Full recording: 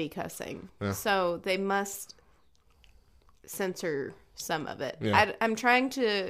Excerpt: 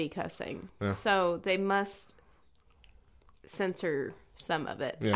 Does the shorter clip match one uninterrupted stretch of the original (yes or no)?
yes